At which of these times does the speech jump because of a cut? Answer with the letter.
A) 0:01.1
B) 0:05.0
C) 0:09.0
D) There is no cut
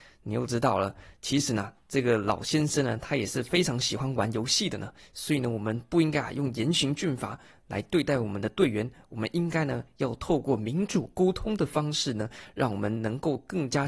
D